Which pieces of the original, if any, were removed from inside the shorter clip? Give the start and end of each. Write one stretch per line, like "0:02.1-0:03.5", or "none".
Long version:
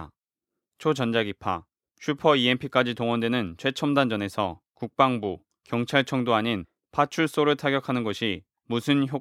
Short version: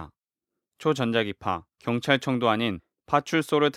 0:01.7-0:05.6

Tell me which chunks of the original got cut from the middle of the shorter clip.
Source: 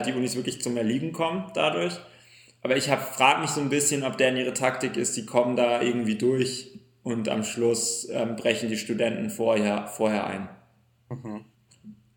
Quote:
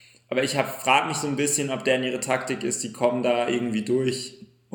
none

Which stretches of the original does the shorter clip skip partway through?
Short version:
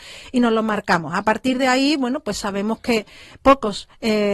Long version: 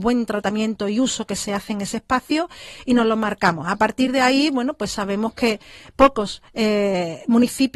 none

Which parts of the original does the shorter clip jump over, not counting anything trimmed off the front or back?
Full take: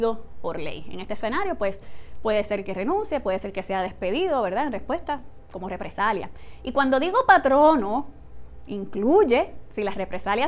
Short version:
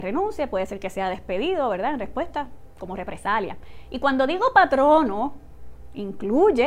none

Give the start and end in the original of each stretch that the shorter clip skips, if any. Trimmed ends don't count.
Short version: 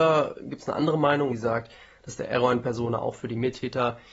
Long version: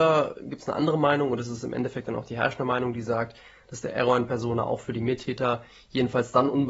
0:01.3-0:02.9

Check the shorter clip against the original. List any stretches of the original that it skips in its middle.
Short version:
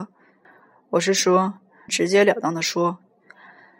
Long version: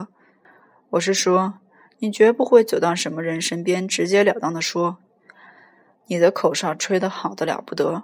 0:01.9-0:03.9

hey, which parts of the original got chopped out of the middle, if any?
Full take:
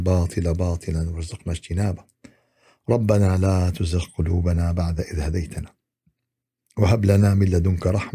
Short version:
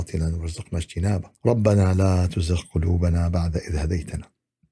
0:02.1-0:02.8

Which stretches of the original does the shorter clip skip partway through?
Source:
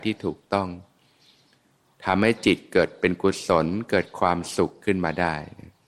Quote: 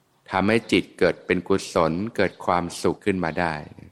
0:04.7-0:04.8

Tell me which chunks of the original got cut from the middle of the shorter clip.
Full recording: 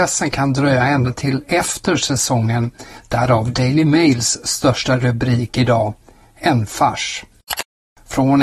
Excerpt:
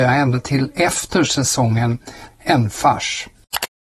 0:03.0-0:06.3

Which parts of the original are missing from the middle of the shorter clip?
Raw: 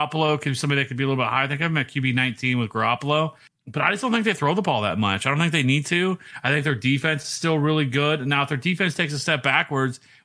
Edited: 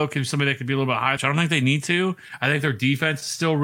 0:01.5-0:05.2

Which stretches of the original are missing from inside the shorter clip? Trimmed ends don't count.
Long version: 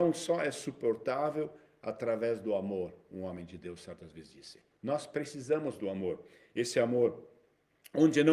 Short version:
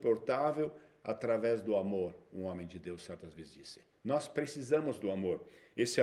none

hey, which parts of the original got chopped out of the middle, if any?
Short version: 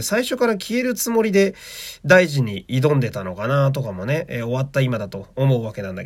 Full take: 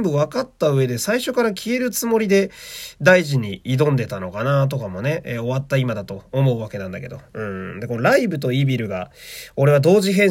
none

